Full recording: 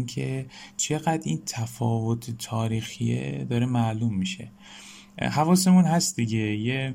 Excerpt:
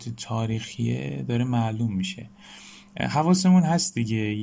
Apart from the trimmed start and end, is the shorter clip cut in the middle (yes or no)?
no